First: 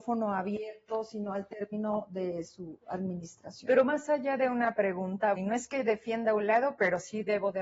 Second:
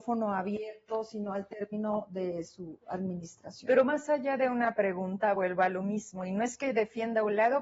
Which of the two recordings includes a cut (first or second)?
first